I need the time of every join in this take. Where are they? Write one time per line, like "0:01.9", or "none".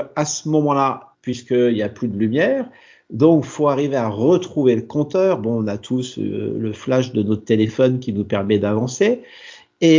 0:01.1

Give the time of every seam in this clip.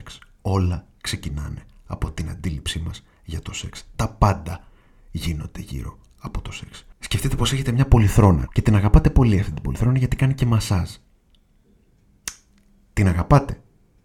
0:08.5

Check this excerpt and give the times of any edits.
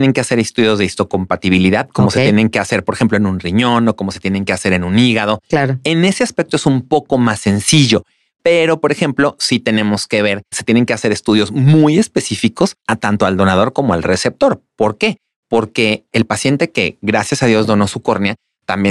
0:10.5
0:12.8

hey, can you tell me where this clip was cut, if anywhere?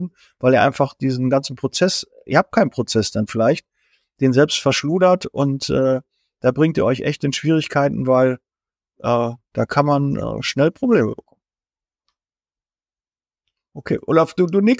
none

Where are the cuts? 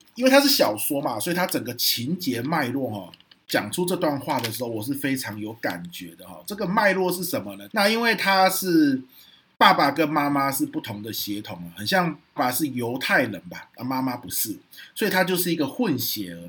0:07.7
0:12.4

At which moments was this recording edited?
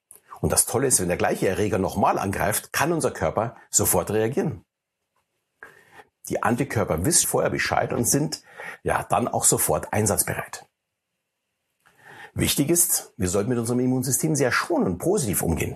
0:06.1
0:07.2

